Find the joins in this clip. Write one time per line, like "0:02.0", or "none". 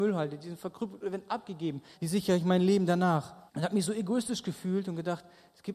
0:01.9
0:03.5